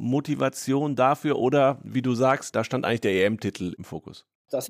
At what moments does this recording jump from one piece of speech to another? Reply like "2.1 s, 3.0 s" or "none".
2.5 s